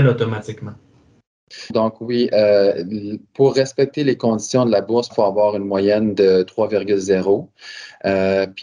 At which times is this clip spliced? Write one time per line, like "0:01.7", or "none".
0:01.7
0:05.1